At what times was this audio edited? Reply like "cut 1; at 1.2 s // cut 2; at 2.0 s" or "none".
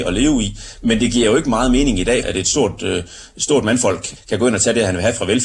cut 1; at 2.2 s // cut 2; at 4.2 s